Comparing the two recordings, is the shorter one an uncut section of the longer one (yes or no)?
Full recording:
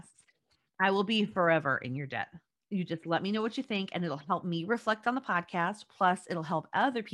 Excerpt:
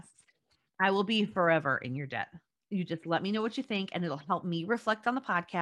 yes